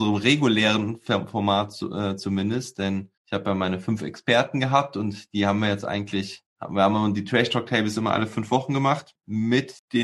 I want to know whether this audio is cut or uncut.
uncut